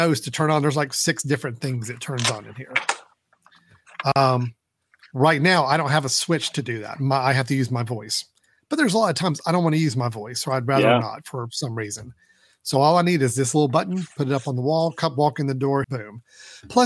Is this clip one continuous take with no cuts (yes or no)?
no